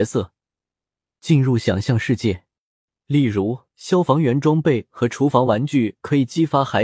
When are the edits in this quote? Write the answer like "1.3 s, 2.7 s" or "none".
3.7 s

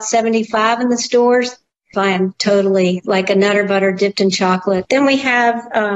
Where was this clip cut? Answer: 1.9 s, 4.8 s

